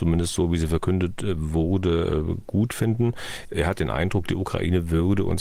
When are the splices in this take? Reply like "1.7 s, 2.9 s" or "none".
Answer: 3.5 s